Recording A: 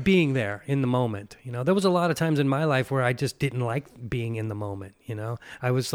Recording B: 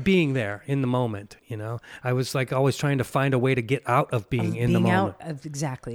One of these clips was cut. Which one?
B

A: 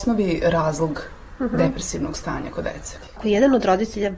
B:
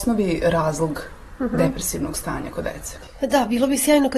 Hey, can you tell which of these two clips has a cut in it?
A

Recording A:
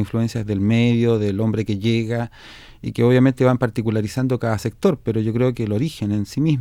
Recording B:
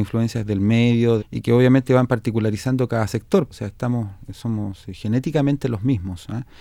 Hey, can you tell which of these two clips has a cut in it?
B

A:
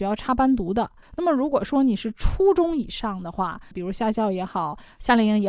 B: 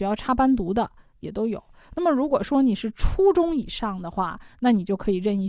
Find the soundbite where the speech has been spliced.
A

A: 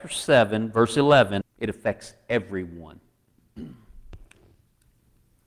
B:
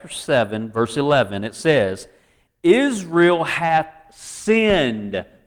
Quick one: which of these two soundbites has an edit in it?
A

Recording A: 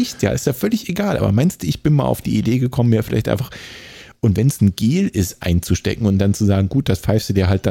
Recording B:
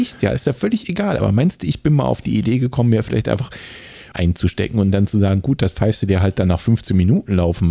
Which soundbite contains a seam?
B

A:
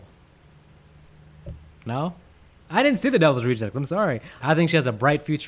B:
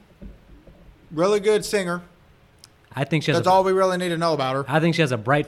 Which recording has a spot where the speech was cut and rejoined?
A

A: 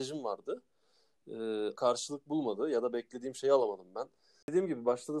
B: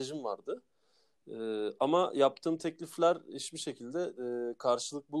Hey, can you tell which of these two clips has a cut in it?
A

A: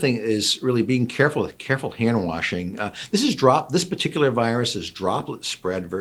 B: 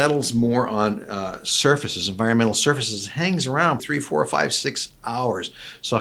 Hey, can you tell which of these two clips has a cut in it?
B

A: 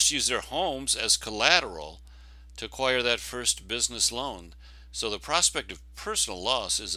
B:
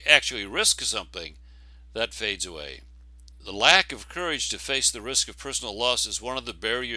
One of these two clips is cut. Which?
B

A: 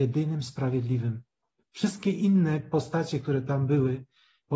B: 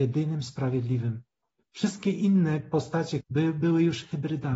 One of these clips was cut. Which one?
B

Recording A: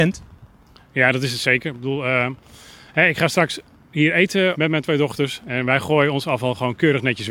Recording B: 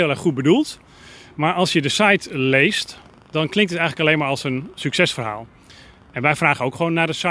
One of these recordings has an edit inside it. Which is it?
A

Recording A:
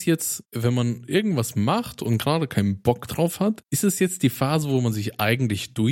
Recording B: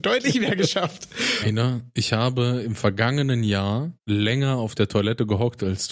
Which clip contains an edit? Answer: B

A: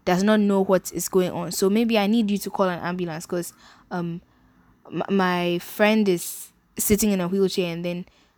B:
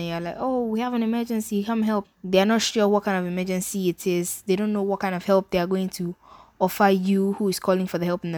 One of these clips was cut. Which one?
B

